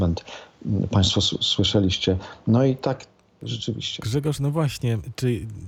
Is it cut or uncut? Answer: cut